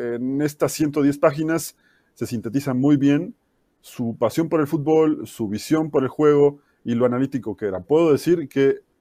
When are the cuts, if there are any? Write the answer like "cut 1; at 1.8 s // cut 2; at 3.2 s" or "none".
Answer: none